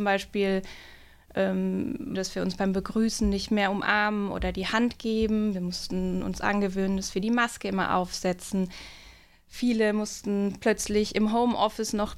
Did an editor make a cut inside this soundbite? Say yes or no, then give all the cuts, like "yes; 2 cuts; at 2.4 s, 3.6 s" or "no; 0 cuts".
yes; 1 cut; at 2.2 s